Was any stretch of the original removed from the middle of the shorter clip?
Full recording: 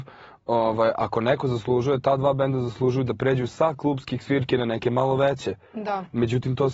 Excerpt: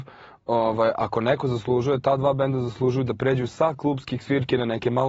no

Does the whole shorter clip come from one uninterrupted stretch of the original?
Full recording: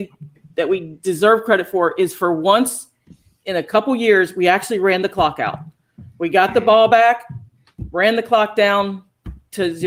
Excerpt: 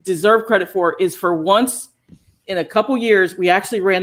yes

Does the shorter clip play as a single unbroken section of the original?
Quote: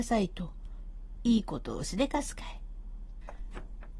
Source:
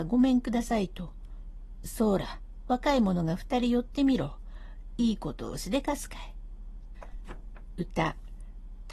no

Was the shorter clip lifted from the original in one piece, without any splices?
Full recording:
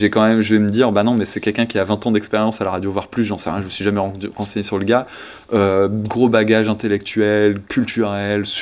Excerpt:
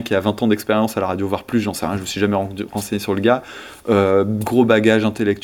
yes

